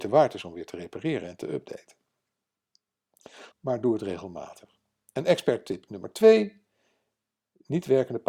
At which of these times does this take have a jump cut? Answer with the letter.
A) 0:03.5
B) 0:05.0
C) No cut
A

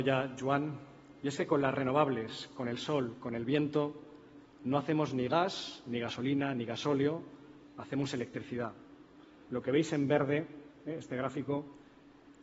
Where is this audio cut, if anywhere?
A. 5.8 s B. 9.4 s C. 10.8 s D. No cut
B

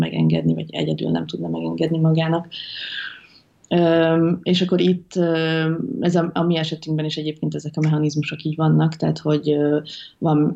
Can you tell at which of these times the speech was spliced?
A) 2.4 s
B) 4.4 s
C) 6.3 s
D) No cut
D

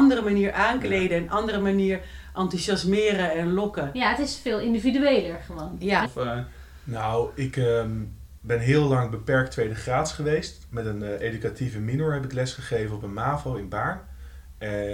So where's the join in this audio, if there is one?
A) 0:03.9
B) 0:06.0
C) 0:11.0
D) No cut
B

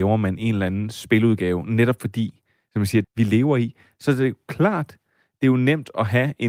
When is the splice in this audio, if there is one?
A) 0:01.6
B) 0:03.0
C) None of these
B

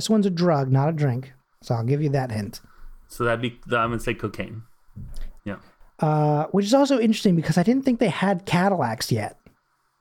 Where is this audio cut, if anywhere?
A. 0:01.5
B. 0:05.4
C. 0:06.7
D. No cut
B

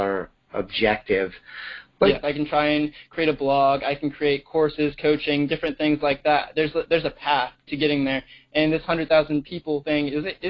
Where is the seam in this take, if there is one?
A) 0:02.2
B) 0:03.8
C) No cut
A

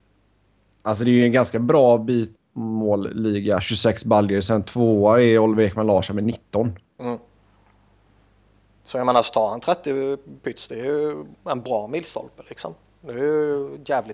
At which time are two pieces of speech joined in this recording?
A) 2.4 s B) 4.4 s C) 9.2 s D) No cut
A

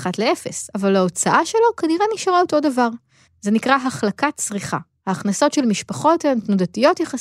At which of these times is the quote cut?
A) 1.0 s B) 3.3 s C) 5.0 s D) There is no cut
B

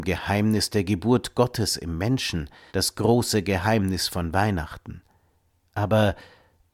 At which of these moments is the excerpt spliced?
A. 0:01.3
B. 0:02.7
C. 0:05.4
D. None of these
B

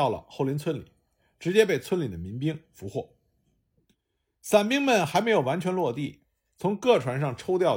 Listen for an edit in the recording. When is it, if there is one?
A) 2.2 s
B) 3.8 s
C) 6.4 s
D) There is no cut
D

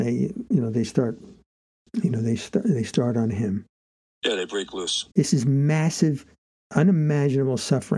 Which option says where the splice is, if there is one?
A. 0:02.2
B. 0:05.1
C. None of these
B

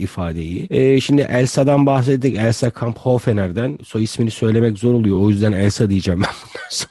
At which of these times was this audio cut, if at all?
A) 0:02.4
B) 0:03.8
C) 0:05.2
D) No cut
D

